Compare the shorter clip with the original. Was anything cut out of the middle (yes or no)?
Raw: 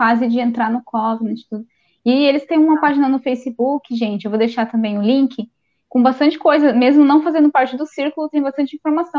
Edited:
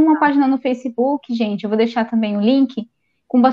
no